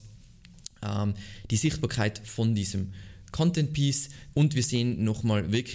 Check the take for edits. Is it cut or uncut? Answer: cut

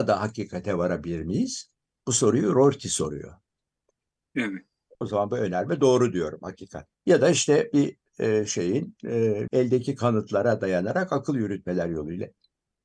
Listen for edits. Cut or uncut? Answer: cut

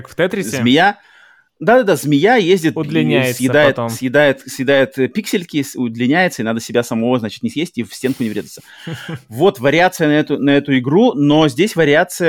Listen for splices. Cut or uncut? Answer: uncut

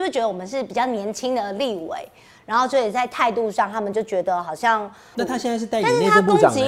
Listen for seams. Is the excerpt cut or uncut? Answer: cut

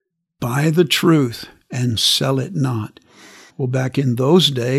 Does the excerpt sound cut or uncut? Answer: cut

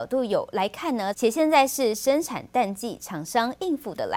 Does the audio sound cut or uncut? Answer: cut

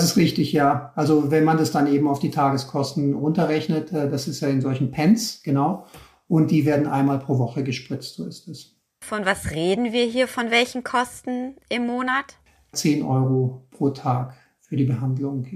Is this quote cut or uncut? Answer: cut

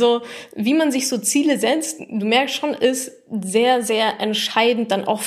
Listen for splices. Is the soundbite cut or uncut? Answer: uncut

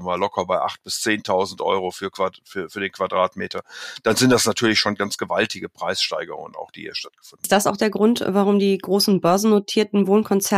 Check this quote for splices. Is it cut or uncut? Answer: uncut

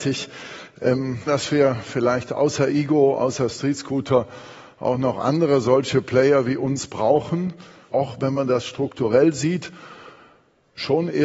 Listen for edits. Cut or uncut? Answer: cut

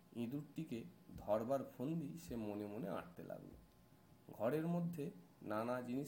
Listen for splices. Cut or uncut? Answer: uncut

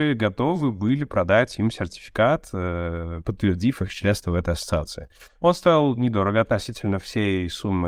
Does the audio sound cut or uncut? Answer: uncut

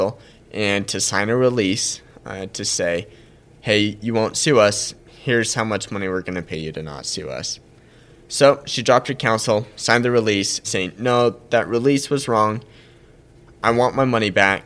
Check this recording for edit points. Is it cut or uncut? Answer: cut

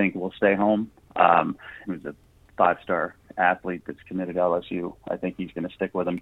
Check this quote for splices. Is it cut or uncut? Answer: cut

